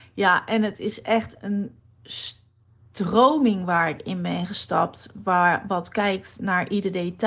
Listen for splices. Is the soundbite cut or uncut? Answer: uncut